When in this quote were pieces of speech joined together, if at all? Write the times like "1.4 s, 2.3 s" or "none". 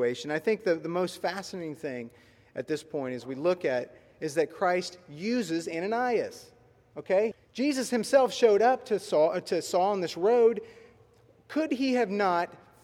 7.3 s